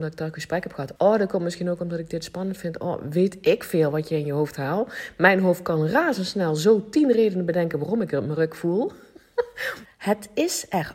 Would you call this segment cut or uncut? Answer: cut